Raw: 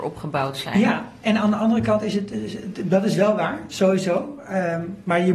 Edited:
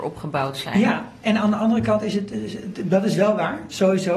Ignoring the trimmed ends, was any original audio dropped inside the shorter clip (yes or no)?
no